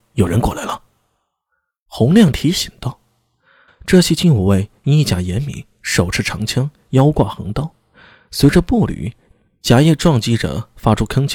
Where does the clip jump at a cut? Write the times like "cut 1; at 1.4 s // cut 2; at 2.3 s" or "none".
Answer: cut 1; at 3.7 s